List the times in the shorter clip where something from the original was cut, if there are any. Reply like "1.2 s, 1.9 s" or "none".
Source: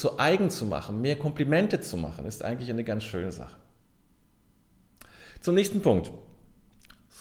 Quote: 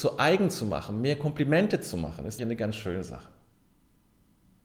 2.4 s